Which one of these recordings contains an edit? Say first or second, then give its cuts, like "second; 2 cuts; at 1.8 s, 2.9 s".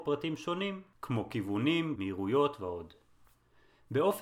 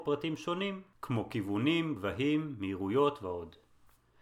first; 1 cut; at 2.0 s